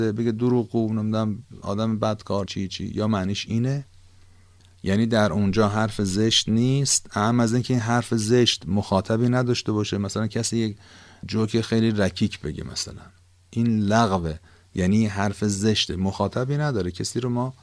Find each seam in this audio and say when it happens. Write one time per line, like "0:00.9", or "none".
0:02.5